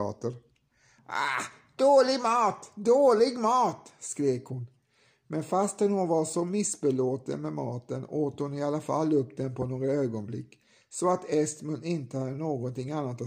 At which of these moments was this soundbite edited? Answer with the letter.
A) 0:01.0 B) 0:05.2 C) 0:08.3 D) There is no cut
A